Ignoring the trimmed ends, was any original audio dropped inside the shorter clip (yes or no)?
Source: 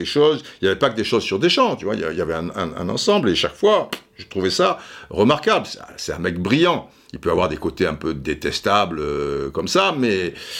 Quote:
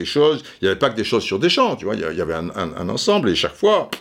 no